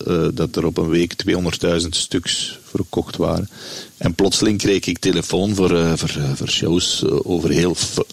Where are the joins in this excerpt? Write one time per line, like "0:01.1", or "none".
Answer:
0:03.9